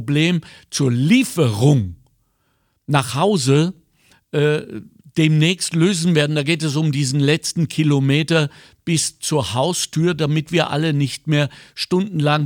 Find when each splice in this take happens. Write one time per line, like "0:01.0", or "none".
none